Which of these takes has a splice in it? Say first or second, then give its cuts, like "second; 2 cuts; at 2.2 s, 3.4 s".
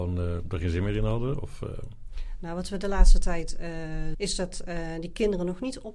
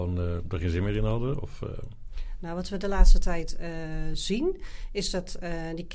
first; 1 cut; at 4.1 s